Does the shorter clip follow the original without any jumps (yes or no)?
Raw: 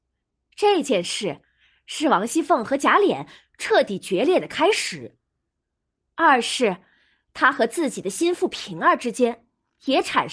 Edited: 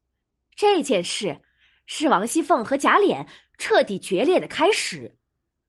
yes